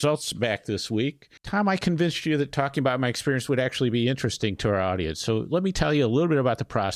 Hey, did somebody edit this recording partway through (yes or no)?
yes